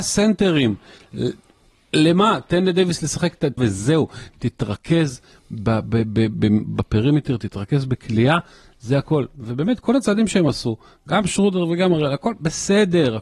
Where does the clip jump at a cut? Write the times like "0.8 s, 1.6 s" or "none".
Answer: 3.6 s

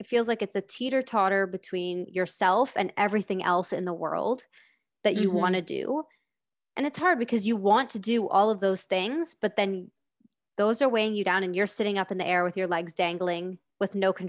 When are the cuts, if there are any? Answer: none

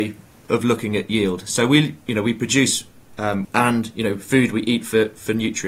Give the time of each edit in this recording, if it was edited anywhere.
3.4 s

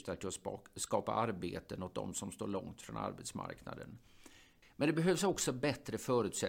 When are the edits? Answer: 4.6 s

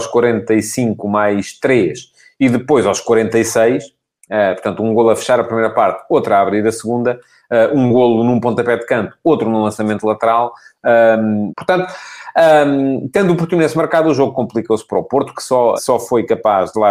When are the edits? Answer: 11.5 s, 15.8 s

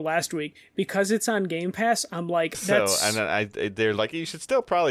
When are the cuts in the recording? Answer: 2.5 s

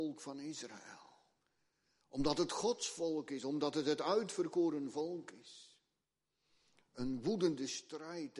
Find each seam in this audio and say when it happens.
none

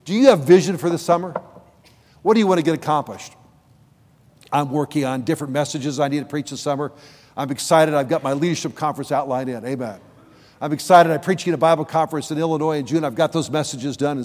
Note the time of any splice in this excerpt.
none

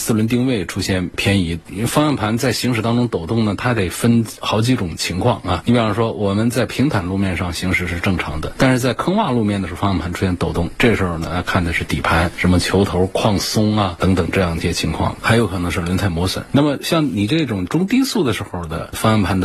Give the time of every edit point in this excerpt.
1.7 s

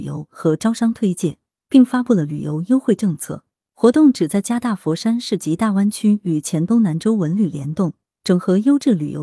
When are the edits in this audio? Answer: none

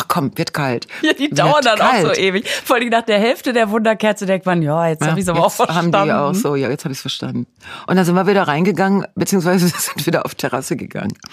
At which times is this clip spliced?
none

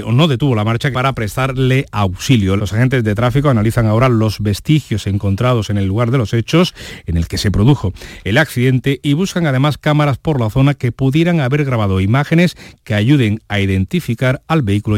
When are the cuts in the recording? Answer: 0.9 s, 2.6 s

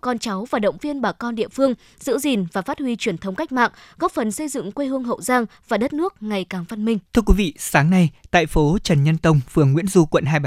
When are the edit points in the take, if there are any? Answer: 7.1 s

